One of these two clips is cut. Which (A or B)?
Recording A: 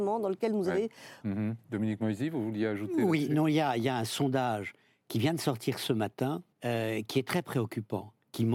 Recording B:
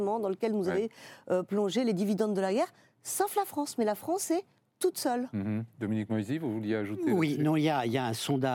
A